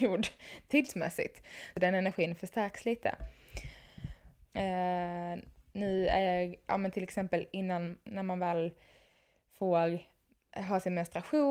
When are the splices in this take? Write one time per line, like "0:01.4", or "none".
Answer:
0:04.5